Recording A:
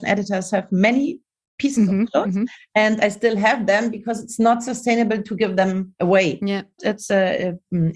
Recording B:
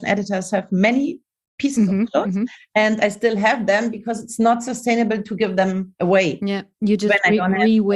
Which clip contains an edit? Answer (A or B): A